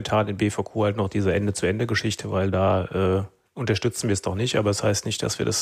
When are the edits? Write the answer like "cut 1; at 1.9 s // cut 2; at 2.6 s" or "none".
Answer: none